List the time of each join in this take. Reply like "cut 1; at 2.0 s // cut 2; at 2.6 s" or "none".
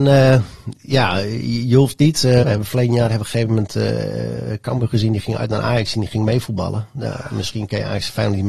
cut 1; at 2.4 s